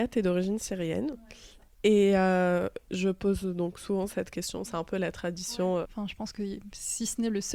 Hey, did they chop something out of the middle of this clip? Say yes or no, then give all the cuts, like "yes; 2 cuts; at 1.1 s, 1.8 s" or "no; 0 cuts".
yes; 1 cut; at 5.8 s